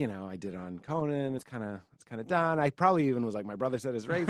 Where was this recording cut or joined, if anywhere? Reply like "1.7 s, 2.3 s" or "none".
none